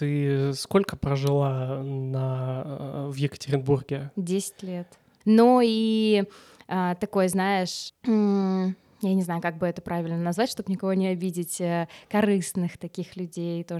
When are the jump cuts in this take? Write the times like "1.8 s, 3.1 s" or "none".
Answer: 5.2 s, 7.9 s